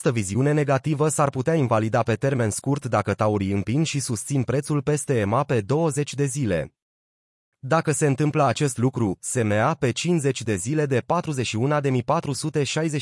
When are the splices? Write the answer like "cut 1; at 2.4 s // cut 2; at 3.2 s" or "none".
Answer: cut 1; at 9.2 s